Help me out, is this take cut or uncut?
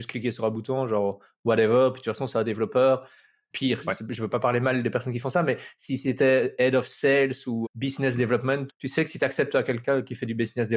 cut